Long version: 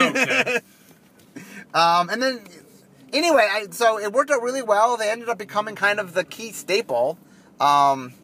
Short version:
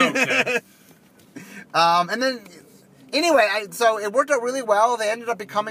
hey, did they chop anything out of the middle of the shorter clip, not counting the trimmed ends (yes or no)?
no